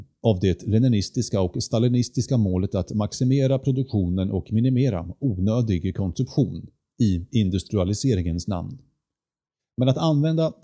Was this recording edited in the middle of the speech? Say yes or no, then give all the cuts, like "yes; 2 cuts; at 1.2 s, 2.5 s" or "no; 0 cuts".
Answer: yes; 1 cut; at 9.6 s